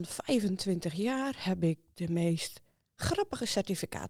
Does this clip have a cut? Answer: no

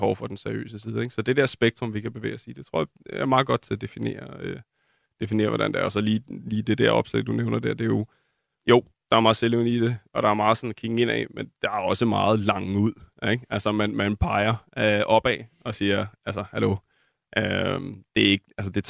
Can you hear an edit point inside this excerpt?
no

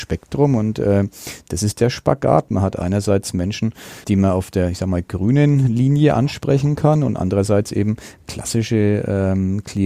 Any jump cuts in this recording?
yes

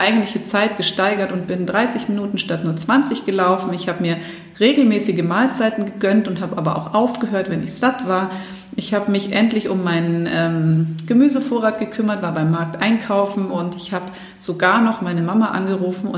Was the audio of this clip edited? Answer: no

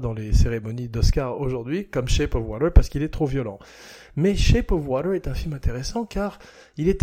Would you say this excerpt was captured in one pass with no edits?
yes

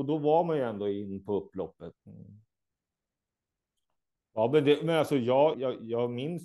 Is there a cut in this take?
yes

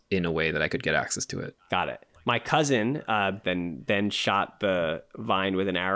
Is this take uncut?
no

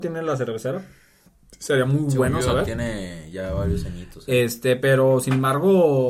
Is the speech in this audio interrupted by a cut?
no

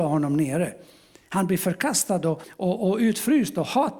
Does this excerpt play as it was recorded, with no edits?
no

